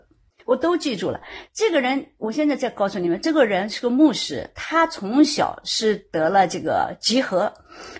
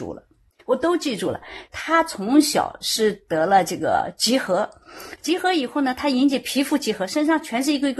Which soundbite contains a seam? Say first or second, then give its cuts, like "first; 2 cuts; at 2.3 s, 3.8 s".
second; 1 cut; at 1.7 s